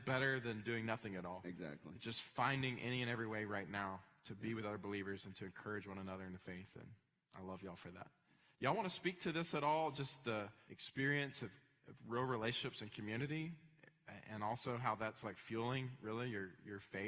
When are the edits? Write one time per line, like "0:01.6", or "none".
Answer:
0:10.7